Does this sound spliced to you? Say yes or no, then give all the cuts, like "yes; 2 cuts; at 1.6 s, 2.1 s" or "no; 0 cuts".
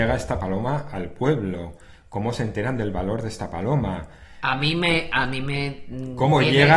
no; 0 cuts